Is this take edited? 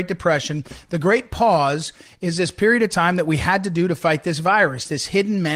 no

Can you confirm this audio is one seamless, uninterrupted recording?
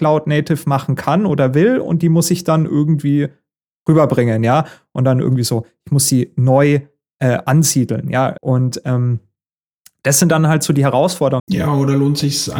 no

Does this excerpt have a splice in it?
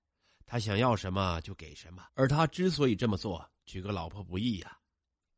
yes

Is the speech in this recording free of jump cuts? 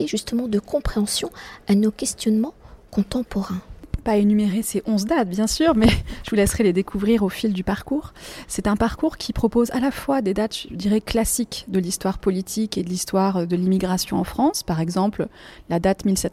yes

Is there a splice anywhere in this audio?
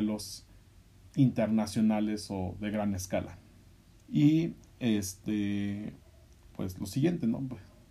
yes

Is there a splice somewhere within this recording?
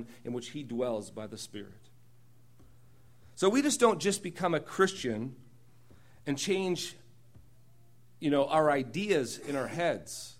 no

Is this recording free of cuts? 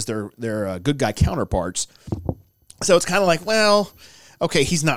yes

